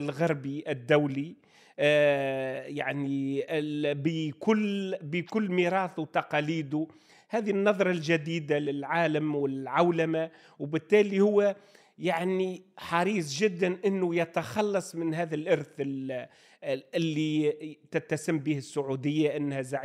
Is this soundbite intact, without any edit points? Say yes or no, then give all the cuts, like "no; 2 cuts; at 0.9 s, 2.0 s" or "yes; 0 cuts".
yes; 0 cuts